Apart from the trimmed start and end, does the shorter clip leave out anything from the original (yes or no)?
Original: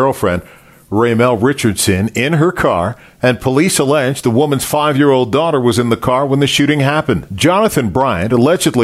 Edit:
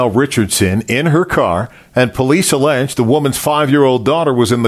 no